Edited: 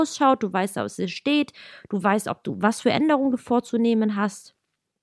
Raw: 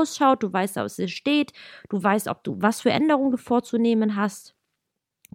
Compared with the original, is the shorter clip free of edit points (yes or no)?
yes